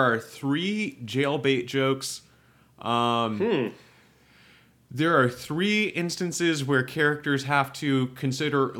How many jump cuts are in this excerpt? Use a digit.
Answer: 0